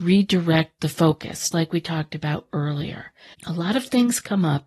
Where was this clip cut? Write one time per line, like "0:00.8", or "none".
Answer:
0:01.5
0:03.3

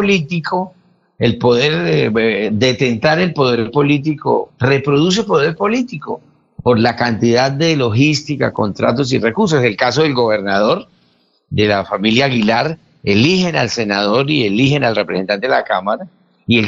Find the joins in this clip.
none

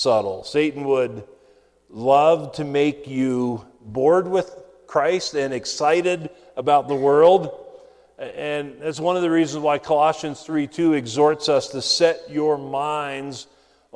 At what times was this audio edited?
none

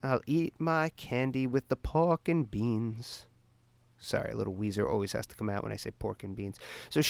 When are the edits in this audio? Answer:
none

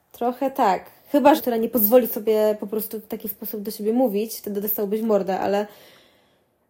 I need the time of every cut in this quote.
0:01.4

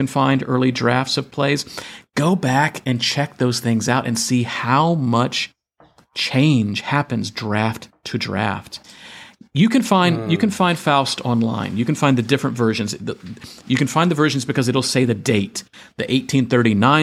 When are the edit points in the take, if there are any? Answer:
none

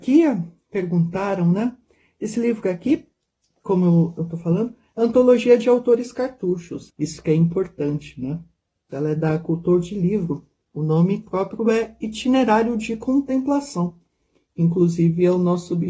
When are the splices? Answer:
0:06.9
0:08.9

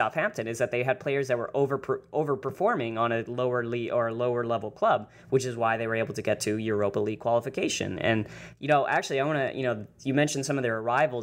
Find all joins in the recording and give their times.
none

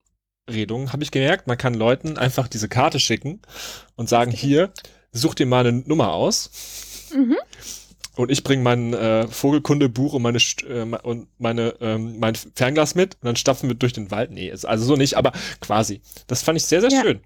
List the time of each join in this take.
none

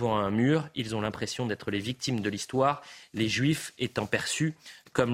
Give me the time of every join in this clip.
none

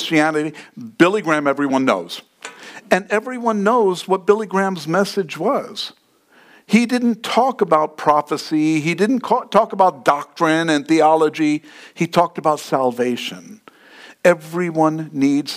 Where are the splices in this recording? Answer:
none

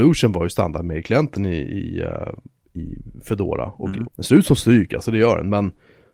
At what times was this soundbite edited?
0:04.0

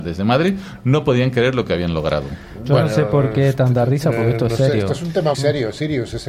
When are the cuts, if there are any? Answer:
0:05.3

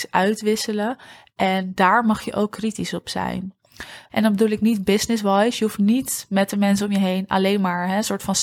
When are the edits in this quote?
0:04.1

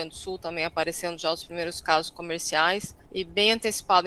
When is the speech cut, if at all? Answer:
0:03.0

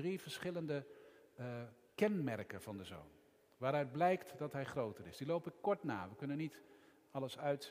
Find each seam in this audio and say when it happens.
none

